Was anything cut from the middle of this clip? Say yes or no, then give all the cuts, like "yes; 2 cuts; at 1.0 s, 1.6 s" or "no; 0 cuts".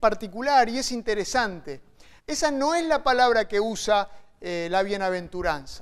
yes; 1 cut; at 2.2 s